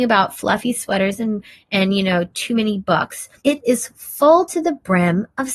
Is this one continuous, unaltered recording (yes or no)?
no